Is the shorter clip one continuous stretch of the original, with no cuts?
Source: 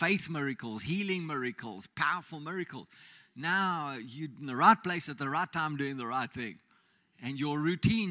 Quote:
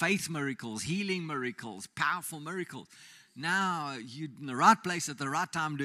yes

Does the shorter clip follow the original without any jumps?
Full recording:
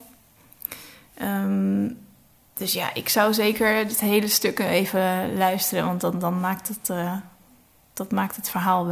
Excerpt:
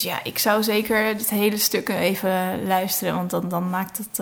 yes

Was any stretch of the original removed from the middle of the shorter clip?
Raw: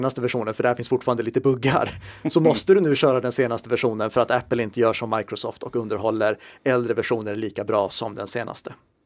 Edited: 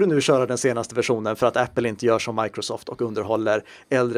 no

